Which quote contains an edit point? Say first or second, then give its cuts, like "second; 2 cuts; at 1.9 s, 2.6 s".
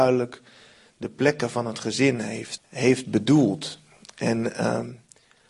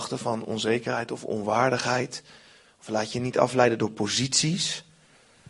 first; 1 cut; at 2.6 s